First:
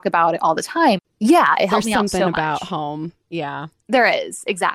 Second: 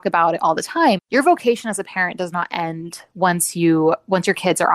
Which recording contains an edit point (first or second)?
first